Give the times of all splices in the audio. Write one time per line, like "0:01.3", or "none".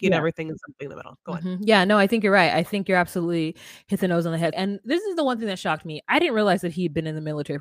0:04.5